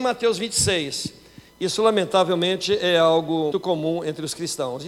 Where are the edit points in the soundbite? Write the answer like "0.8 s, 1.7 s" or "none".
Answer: 1.5 s, 3.5 s